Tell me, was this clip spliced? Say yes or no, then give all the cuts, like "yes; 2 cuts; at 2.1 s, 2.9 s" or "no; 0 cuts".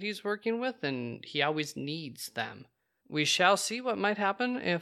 yes; 1 cut; at 3.0 s